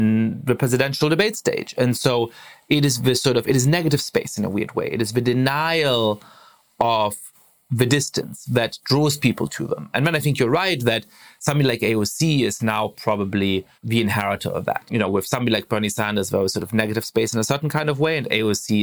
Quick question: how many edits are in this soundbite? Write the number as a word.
one